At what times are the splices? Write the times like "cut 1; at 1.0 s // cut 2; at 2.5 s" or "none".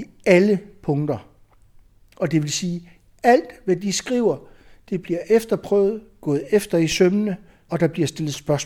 cut 1; at 7.7 s